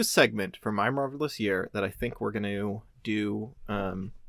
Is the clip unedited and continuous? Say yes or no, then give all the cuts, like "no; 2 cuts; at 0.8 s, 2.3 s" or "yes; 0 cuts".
yes; 0 cuts